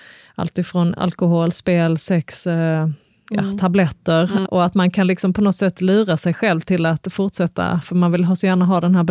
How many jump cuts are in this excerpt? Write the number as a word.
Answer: one